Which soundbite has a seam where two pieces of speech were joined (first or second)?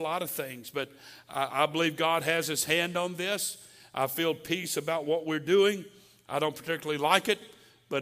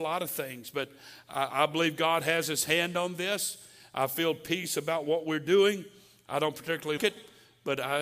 second